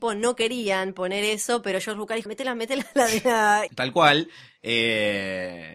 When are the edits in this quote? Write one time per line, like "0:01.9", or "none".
0:02.3
0:03.7

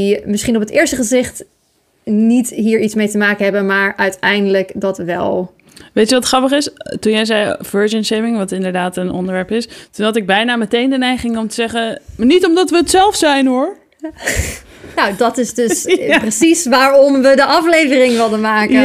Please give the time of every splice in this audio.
none

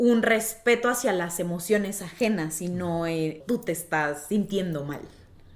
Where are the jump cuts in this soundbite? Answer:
0:03.4

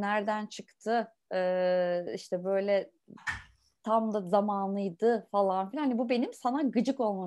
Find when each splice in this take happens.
none

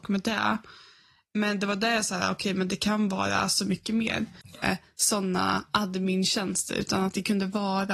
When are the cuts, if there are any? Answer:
0:04.6

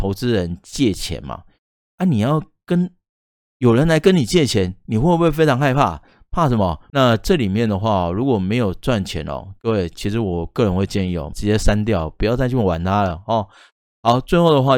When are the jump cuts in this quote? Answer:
0:06.9
0:11.3

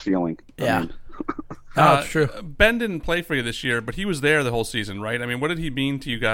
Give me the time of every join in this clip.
none

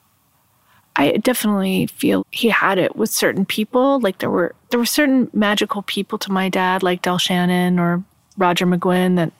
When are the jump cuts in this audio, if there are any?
0:02.2

